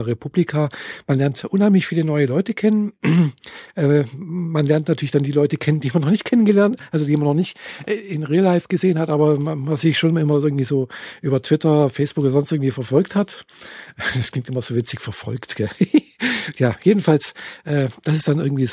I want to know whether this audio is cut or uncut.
uncut